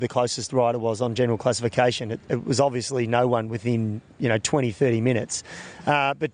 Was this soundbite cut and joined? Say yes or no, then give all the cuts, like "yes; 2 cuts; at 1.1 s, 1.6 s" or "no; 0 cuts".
no; 0 cuts